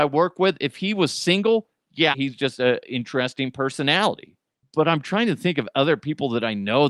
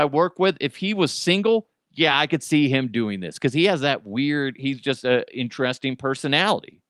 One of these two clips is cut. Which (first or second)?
first